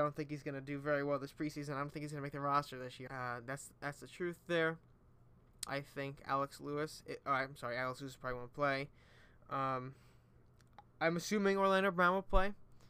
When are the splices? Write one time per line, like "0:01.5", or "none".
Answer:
0:03.1
0:05.7

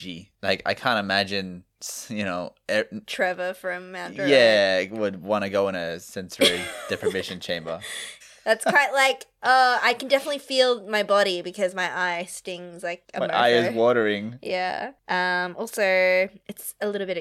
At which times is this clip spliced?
0:08.2

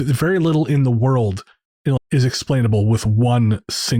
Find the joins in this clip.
0:02.0

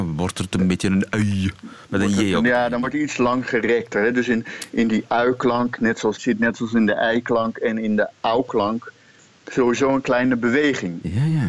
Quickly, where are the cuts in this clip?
0:06.1

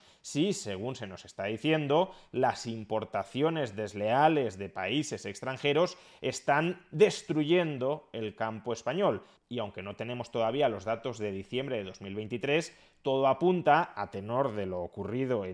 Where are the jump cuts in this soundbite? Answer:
0:09.4

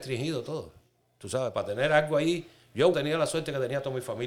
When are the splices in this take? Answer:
0:02.9

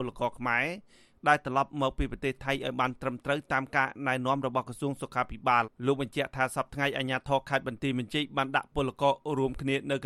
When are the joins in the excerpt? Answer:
0:05.6

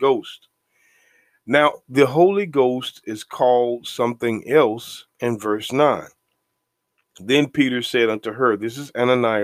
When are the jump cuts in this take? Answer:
none

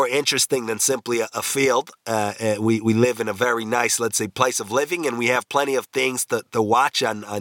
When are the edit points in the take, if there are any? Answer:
none

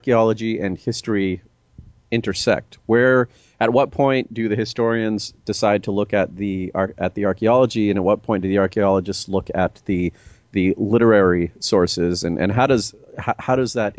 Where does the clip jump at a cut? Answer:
none

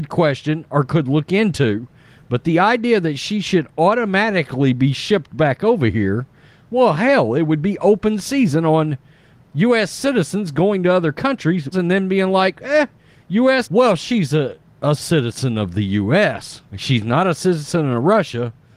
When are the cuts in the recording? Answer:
0:11.7
0:13.6
0:16.6

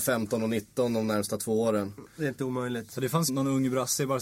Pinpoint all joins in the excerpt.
0:03.3

